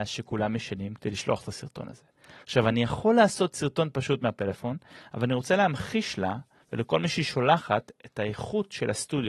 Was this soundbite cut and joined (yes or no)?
no